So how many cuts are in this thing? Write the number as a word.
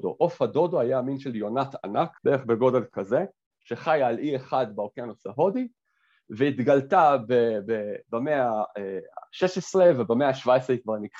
one